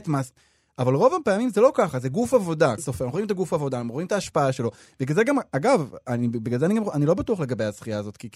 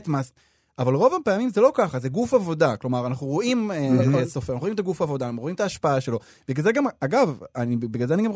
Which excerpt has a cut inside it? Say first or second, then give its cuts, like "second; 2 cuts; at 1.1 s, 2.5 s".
first; 1 cut; at 2.8 s